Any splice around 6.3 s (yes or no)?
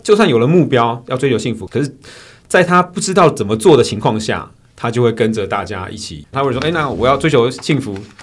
yes